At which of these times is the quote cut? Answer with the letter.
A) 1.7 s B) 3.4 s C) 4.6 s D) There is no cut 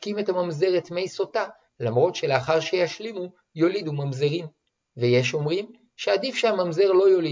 A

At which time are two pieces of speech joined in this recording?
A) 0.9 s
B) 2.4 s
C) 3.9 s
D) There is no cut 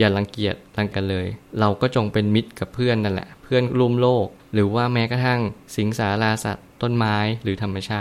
A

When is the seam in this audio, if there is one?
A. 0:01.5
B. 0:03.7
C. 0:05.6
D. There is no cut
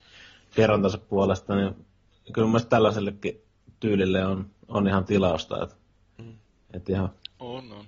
D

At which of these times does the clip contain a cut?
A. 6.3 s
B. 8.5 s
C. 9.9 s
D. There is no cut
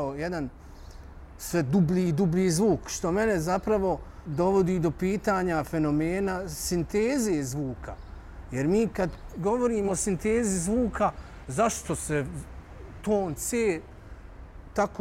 C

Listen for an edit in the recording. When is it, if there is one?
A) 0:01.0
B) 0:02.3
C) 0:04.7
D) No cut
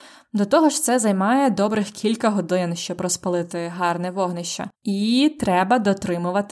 C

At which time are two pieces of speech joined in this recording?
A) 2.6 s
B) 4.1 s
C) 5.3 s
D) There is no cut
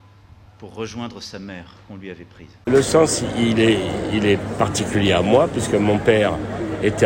A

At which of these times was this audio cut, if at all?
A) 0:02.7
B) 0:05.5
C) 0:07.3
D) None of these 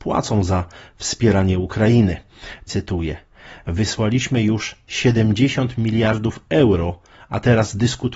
A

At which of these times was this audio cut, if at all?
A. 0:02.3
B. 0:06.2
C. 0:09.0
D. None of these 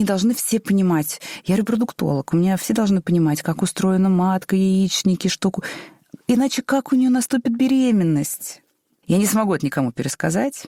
C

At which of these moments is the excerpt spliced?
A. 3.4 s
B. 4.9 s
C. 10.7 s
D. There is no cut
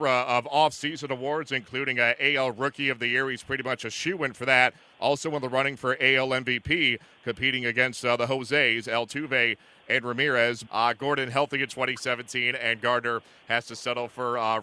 C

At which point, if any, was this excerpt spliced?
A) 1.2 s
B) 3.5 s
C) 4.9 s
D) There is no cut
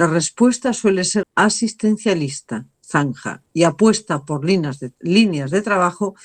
A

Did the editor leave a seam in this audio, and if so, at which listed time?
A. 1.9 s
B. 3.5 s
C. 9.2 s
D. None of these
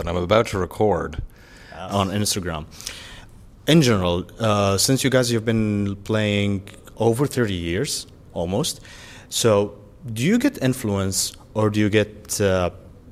A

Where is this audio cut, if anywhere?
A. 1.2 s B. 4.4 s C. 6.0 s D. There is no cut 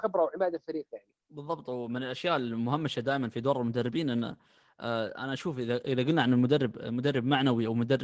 A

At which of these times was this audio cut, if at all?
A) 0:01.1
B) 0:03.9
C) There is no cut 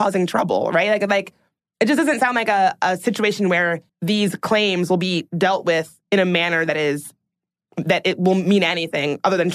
B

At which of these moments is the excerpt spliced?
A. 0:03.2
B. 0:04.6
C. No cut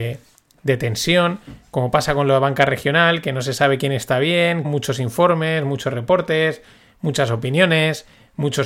B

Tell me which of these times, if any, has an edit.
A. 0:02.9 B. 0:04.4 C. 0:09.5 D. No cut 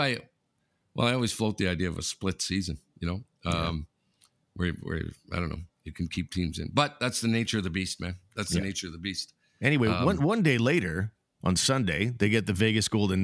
D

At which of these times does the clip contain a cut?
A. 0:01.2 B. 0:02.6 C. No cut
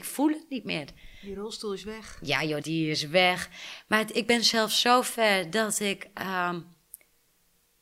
B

